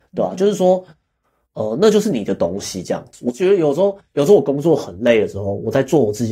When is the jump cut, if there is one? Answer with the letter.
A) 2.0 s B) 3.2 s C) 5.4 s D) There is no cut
D